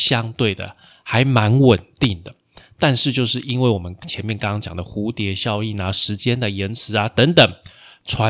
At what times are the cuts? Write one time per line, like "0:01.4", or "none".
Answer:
none